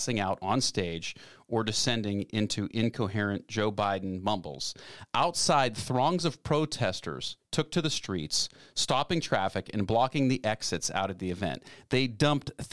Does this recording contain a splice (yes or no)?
no